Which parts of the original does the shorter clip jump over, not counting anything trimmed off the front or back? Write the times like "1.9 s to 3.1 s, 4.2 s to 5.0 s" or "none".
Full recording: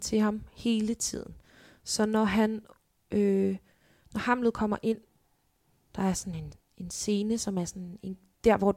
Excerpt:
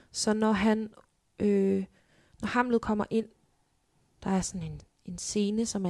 none